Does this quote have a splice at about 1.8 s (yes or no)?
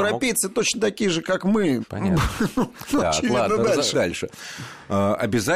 yes